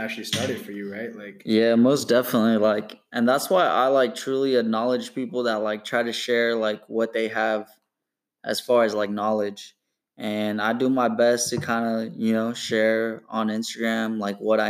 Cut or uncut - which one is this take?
uncut